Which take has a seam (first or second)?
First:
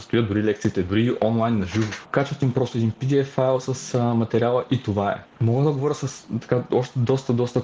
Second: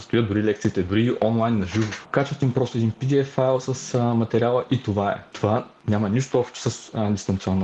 first